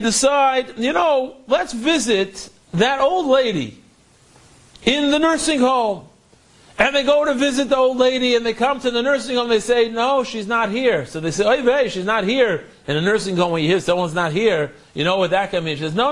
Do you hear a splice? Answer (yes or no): no